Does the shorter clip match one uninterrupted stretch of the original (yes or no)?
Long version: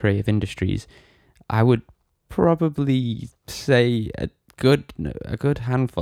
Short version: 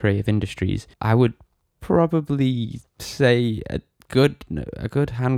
no